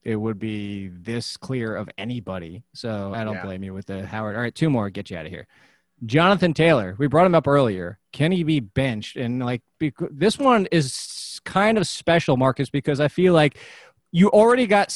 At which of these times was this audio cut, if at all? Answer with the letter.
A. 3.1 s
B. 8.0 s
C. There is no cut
A